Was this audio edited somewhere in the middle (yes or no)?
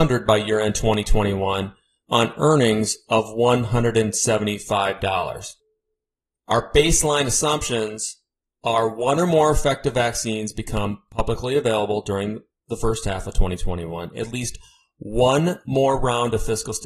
no